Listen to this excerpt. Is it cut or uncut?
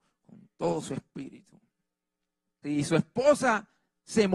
cut